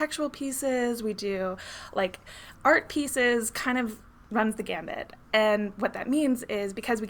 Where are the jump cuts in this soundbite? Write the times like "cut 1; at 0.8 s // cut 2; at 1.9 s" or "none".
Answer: none